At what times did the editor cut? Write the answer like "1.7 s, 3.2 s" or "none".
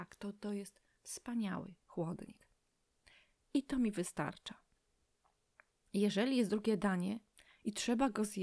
none